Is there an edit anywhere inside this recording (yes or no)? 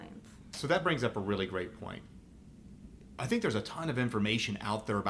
no